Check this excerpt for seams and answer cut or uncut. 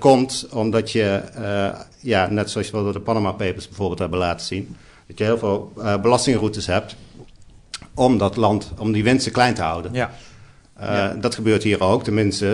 uncut